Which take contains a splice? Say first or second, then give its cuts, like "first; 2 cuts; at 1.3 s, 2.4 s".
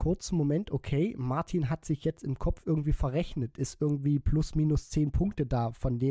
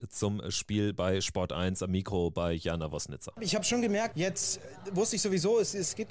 second; 1 cut; at 4.1 s